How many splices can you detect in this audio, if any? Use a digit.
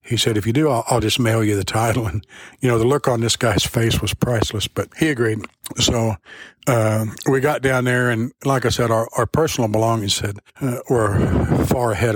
0